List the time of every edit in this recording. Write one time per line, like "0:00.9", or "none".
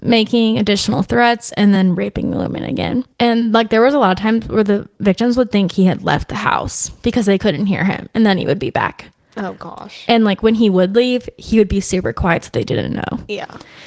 none